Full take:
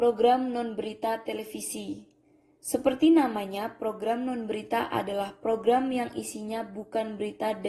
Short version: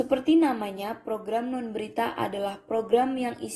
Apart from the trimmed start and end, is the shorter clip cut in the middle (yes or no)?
no